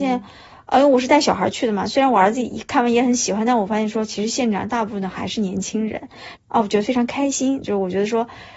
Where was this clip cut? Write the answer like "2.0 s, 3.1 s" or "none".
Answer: 6.4 s, 7.6 s